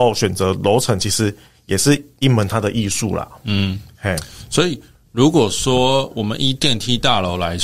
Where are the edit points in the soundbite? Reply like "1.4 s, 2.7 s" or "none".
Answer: none